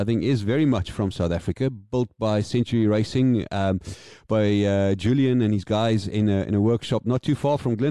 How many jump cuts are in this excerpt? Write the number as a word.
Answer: zero